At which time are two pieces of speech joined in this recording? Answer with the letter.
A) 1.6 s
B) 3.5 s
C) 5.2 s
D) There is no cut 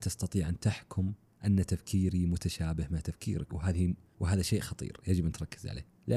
B